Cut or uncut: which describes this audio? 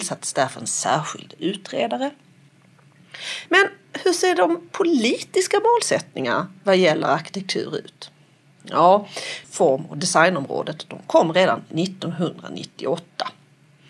cut